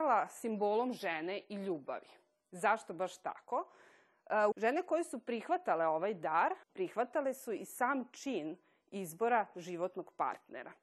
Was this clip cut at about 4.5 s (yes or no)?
yes